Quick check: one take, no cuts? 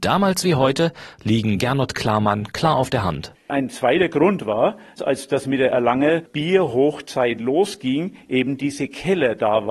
no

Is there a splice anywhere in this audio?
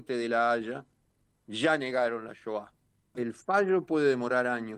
yes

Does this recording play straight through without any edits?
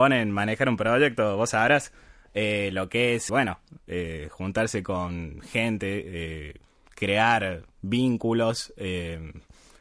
no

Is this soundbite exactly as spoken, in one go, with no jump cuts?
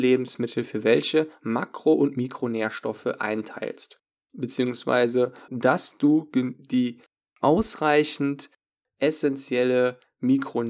no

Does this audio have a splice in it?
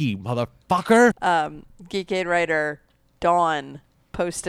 yes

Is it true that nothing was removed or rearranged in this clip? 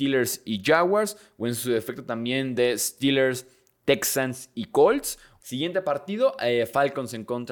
no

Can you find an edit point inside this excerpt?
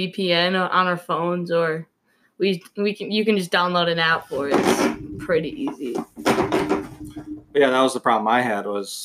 no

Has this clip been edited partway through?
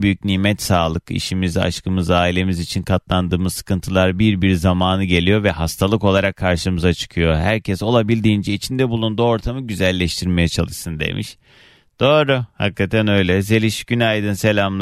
no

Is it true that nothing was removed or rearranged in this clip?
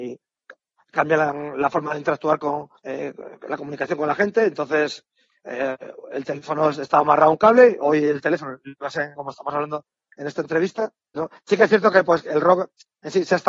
no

